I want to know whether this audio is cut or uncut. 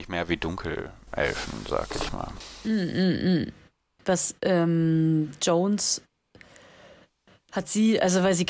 uncut